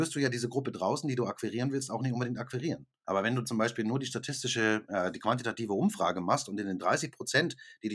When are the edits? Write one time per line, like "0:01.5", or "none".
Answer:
0:03.0